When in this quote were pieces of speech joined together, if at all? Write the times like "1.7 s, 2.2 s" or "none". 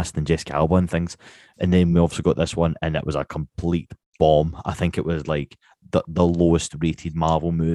none